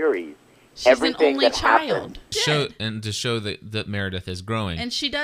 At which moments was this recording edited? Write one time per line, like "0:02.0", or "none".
0:02.3